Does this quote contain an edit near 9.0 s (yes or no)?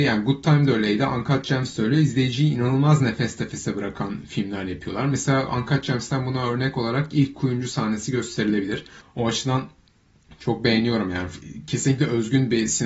yes